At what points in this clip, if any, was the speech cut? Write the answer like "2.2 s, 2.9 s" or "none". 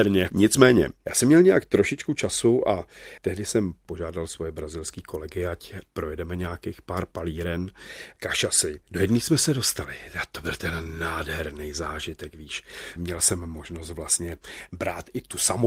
8.8 s